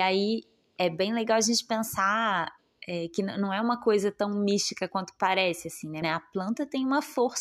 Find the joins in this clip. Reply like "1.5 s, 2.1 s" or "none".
6.0 s